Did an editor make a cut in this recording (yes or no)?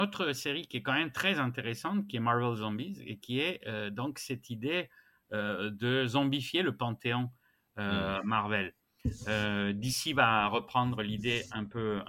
no